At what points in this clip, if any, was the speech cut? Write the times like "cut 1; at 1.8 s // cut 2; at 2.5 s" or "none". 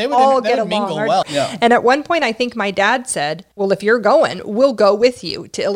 cut 1; at 1.2 s // cut 2; at 3.5 s